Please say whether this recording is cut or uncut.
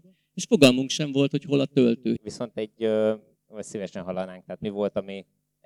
cut